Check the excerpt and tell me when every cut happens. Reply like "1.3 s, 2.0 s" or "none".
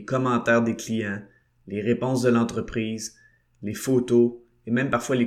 none